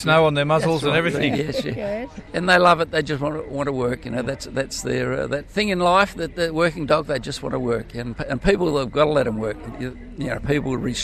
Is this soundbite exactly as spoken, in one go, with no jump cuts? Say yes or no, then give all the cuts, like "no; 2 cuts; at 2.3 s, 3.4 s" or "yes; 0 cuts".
yes; 0 cuts